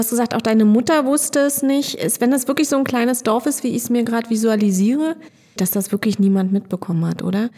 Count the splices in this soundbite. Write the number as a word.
one